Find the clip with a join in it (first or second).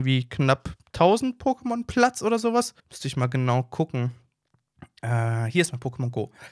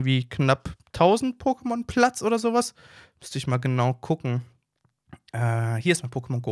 first